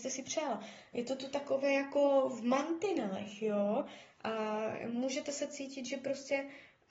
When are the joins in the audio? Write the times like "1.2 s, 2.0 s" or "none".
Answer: none